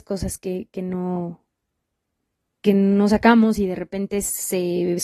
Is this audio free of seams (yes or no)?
yes